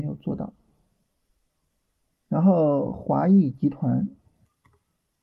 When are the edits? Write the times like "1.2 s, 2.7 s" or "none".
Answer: none

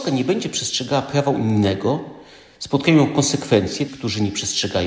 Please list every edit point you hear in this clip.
3.9 s

